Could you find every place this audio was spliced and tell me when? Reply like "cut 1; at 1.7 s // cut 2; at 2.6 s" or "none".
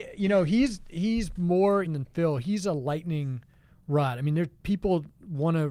cut 1; at 1.9 s